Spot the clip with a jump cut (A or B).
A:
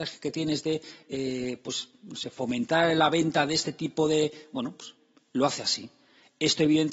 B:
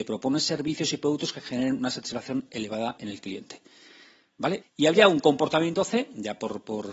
B